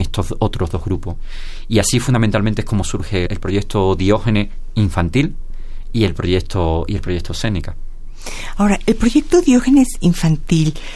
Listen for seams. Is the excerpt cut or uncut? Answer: cut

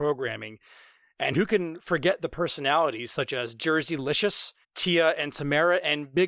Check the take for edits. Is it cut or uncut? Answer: cut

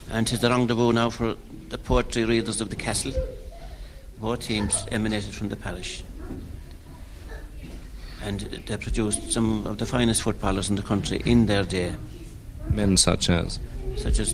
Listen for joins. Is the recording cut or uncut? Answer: cut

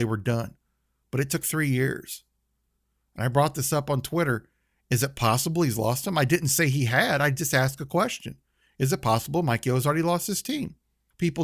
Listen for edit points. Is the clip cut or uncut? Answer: uncut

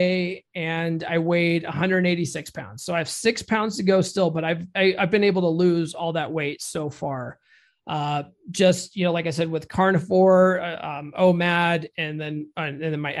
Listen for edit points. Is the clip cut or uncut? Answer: uncut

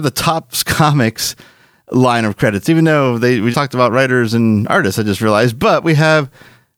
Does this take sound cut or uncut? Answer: cut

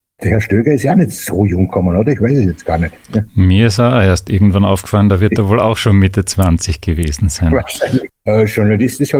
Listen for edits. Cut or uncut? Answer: cut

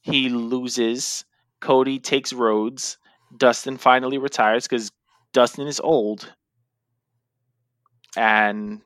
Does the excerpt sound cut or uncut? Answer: uncut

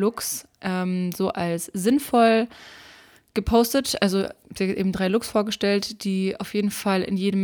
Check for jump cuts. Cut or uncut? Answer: uncut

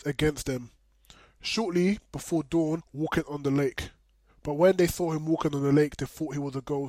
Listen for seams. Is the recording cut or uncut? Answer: cut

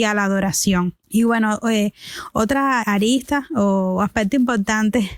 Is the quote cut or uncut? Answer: cut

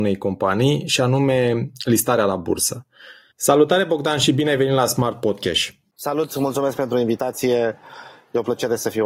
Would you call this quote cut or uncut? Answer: cut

